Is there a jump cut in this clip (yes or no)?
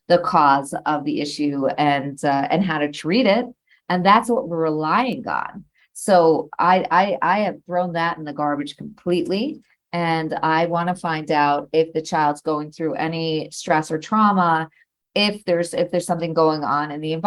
no